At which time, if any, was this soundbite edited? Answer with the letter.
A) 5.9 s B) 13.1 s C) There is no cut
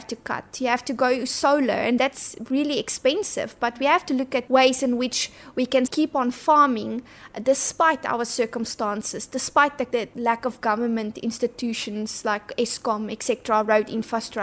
A